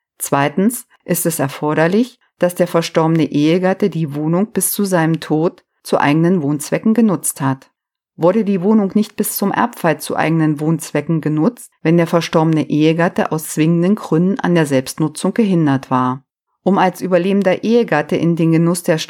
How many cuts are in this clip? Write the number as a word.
two